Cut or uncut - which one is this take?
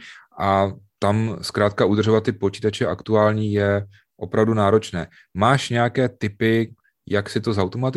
uncut